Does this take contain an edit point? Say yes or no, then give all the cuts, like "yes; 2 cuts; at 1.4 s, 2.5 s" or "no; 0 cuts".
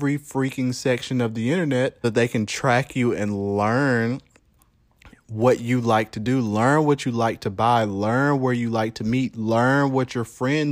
yes; 1 cut; at 2.0 s